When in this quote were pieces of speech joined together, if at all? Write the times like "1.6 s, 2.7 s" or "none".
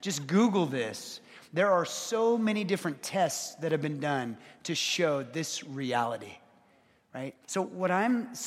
7.4 s